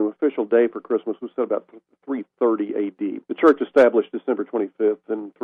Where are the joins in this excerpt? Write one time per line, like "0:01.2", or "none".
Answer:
0:03.2

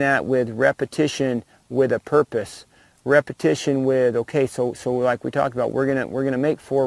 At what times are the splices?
none

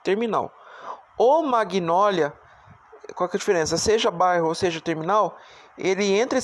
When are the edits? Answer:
none

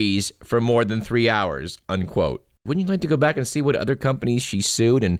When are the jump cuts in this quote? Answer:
0:02.7

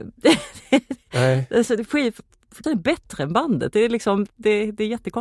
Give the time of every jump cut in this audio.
0:02.6

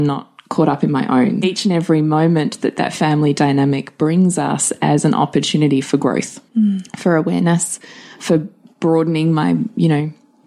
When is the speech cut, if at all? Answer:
0:01.4
0:06.5

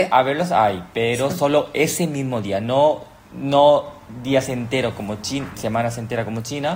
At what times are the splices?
0:05.5

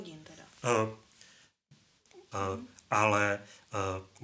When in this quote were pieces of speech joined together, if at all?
0:02.3

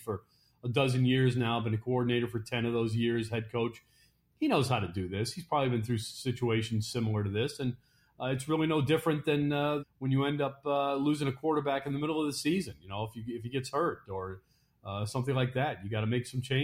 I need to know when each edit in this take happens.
0:09.8

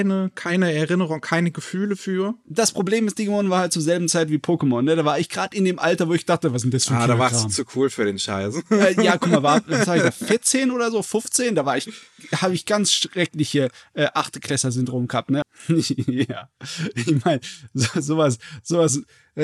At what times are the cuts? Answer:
0:15.4

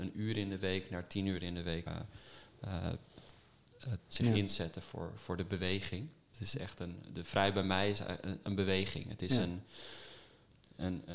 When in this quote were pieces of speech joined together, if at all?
0:01.9
0:04.0

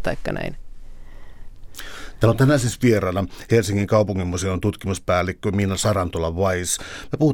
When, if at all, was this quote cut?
none

